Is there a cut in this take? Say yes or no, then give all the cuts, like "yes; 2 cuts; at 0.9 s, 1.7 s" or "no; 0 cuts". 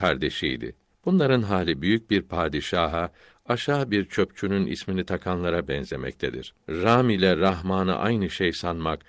yes; 2 cuts; at 0.9 s, 6.6 s